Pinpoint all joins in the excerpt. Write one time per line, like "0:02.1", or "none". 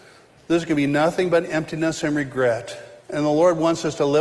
0:03.0

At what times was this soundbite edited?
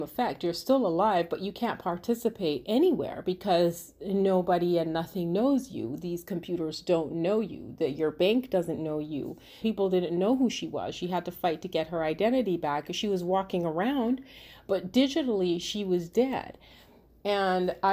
0:09.6

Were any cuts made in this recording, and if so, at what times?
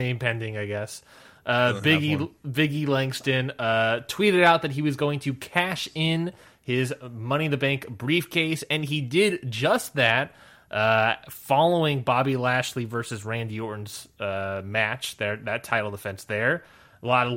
none

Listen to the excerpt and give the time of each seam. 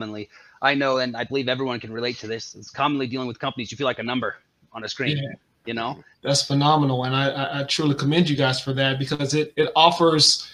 0:06.1
0:09.5

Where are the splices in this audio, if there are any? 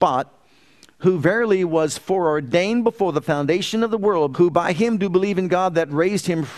0:04.3

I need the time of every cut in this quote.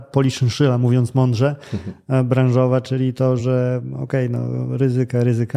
none

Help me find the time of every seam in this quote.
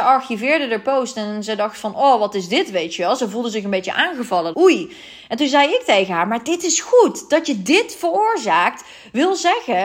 0:04.5

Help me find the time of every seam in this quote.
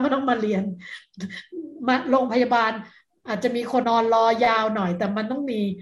0:03.8

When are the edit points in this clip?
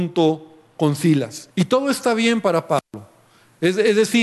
0:01.5

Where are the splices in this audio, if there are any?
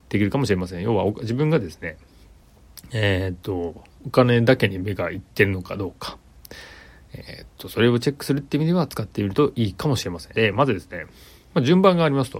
0:10.3

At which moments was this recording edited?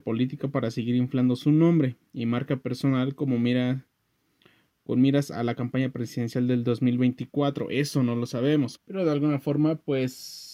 0:08.7

